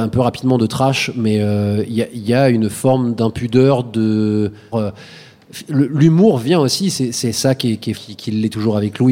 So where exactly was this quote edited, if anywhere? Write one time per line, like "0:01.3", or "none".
0:04.7
0:07.9